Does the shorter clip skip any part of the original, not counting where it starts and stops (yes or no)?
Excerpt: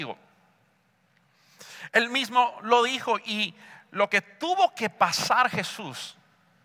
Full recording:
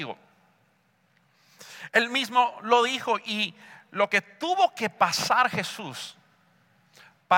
no